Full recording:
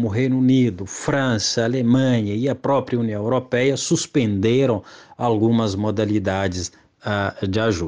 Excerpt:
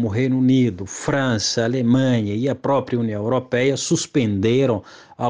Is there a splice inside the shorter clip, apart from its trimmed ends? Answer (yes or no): no